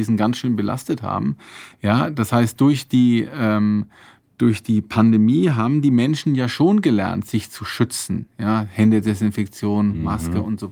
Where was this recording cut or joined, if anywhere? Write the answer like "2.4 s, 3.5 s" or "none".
1.7 s